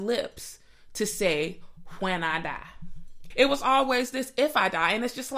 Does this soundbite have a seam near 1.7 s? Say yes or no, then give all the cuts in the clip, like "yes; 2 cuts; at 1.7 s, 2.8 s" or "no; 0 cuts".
no; 1 cut; at 3.3 s